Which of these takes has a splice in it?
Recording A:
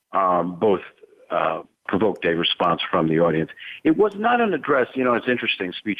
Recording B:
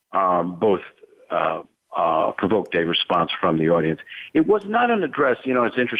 A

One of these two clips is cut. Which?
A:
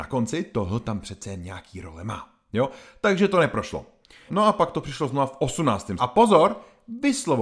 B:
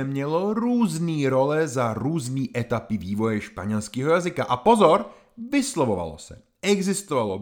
A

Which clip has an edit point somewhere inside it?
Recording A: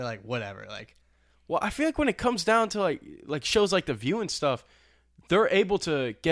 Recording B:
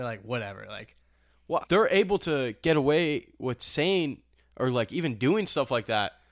B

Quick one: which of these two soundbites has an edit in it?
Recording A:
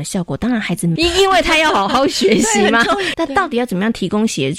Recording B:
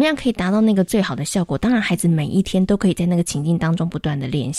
A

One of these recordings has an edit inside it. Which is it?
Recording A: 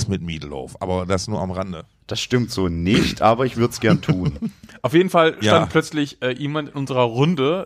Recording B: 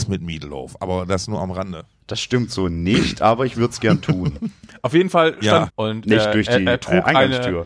B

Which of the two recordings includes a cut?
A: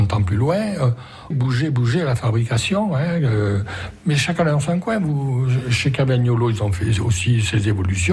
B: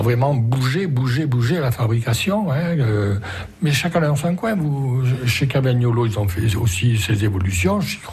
A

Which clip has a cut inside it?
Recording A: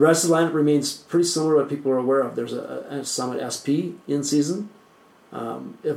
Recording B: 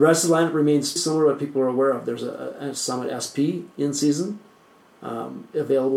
B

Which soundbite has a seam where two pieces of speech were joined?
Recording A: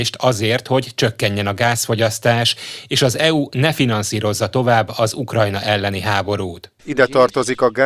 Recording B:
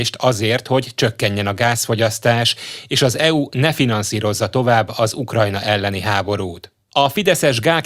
A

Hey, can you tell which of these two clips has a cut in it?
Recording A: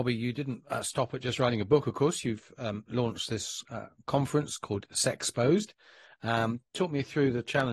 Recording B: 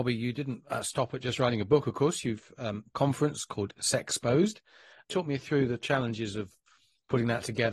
B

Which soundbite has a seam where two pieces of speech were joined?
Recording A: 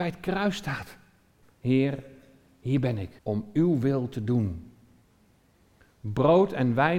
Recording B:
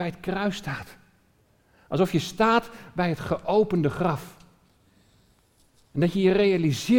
A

